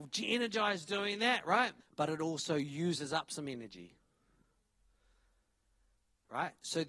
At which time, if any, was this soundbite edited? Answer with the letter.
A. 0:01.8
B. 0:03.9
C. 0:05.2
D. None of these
A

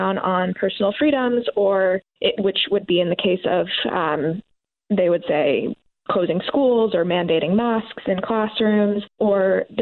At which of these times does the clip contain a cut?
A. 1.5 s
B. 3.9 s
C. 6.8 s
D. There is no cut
D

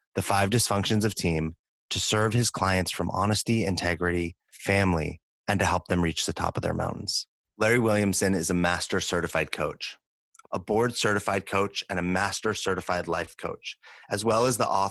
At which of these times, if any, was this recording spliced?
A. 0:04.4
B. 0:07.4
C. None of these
B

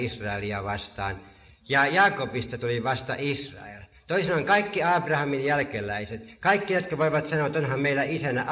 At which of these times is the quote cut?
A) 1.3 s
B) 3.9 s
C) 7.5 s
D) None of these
D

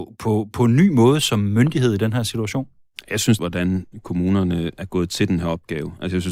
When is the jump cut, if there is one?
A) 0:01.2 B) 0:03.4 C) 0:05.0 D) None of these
B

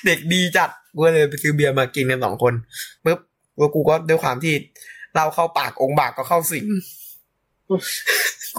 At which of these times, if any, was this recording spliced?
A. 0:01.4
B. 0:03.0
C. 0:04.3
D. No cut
B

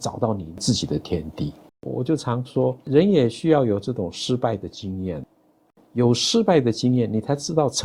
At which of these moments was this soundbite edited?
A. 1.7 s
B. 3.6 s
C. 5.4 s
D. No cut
A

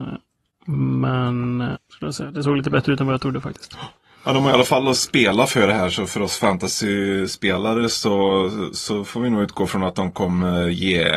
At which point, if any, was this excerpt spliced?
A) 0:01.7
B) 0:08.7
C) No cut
A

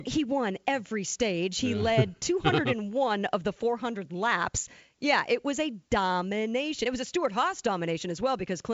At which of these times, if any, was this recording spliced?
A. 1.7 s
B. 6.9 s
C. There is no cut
C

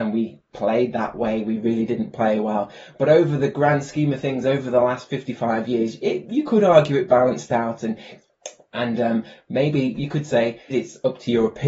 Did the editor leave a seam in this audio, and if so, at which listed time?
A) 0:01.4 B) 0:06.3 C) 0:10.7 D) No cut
C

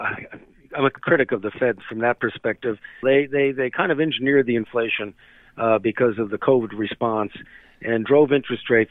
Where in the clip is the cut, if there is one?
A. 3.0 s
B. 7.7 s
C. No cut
A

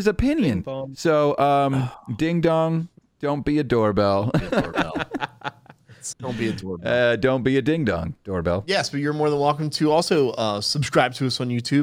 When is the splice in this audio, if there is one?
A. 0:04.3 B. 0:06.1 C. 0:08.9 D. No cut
B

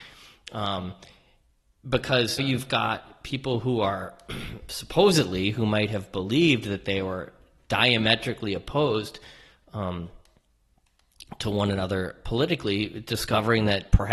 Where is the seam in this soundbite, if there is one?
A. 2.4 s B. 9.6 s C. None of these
A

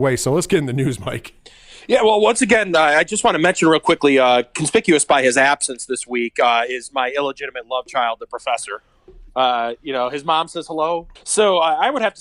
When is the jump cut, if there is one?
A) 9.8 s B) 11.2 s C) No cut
B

